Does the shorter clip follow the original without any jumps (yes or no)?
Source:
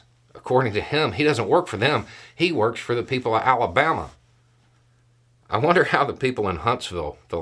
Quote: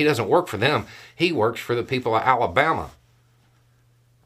yes